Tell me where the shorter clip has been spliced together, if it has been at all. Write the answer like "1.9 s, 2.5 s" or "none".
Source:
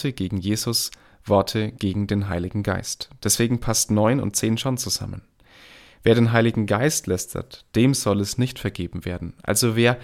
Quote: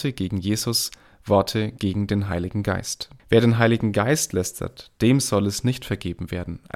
3.2 s